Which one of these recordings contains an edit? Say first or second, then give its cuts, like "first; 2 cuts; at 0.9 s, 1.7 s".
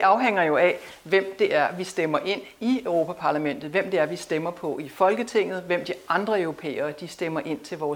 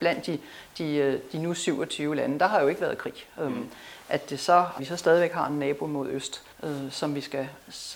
second; 2 cuts; at 4.8 s, 6.5 s